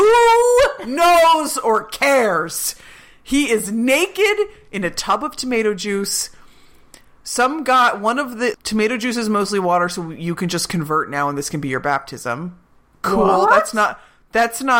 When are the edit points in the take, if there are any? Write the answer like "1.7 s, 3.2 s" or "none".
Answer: 8.5 s